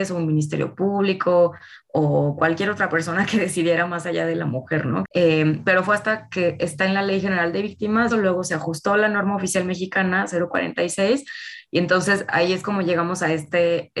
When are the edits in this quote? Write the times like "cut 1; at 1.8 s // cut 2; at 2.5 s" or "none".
cut 1; at 5.0 s // cut 2; at 8.1 s

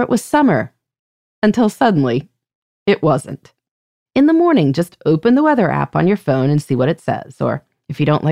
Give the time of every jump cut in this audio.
cut 1; at 4.1 s

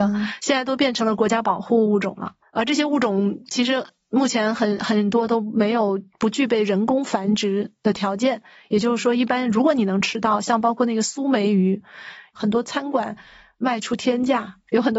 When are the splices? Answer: none

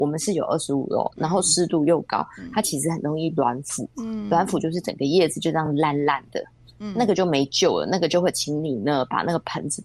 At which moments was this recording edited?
none

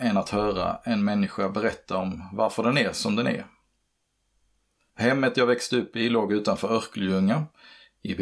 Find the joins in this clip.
cut 1; at 4.9 s

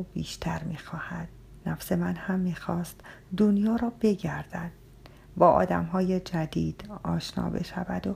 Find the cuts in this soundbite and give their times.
cut 1; at 1.6 s

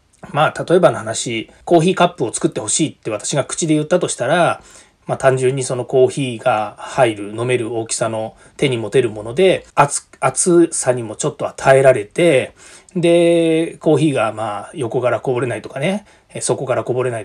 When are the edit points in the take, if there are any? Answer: cut 1; at 1.6 s // cut 2; at 9.7 s

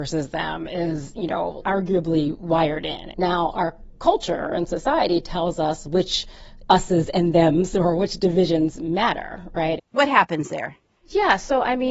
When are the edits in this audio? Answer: cut 1; at 3.1 s // cut 2; at 9.8 s

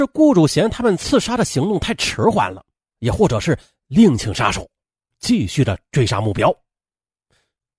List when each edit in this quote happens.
cut 1; at 2.9 s // cut 2; at 5.1 s

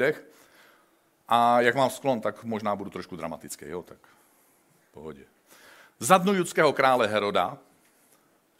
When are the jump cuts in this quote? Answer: none

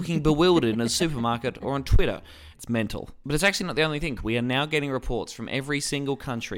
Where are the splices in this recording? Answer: cut 1; at 2.5 s // cut 2; at 4.2 s

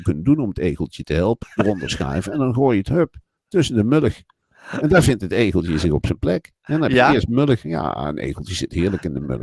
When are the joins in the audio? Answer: cut 1; at 1.4 s

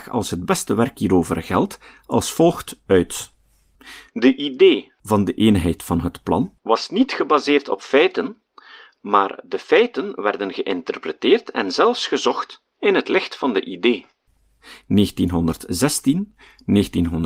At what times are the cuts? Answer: none

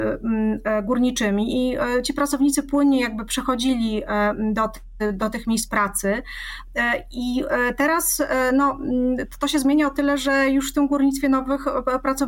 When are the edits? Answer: none

